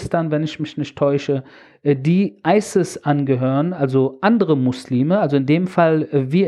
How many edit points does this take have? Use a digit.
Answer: 0